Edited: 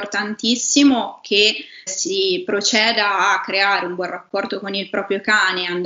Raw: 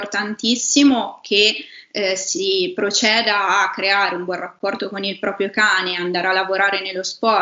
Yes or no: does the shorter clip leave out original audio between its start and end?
yes